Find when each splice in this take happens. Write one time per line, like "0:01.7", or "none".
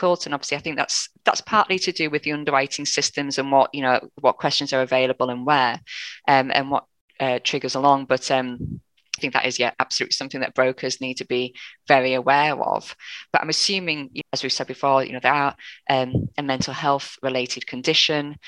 0:09.2
0:14.2